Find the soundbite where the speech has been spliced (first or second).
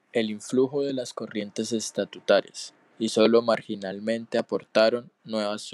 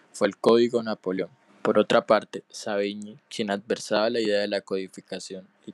second